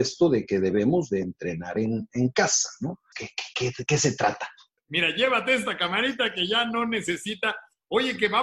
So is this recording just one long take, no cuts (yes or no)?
no